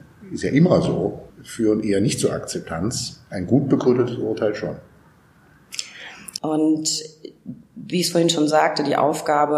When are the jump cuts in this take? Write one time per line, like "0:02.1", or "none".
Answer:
0:01.3
0:06.4